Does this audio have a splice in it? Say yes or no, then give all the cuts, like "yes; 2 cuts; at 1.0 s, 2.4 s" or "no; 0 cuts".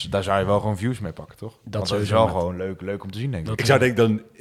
no; 0 cuts